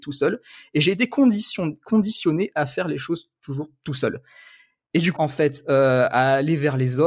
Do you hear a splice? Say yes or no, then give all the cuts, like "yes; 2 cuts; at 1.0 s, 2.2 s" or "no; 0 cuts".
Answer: yes; 1 cut; at 5.2 s